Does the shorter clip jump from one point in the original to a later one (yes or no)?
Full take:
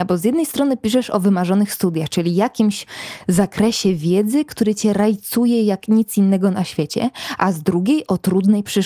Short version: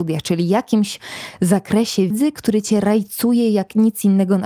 yes